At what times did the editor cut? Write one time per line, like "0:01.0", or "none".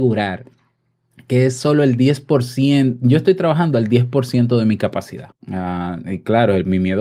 0:05.3